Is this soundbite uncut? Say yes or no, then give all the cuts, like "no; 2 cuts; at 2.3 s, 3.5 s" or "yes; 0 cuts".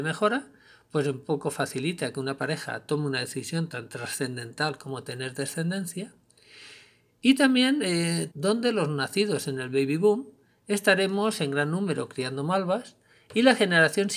no; 1 cut; at 8.3 s